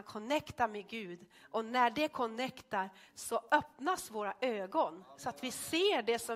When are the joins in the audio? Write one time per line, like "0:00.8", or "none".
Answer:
none